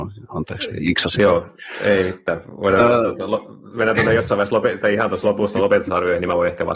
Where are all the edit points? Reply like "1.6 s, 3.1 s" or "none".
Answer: none